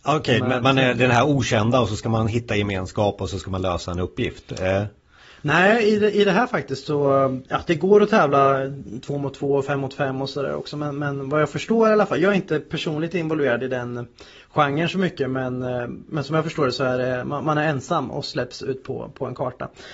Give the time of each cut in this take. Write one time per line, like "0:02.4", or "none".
none